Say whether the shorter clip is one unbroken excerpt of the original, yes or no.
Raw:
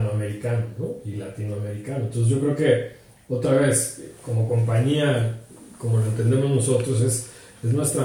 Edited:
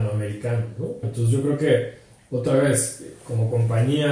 no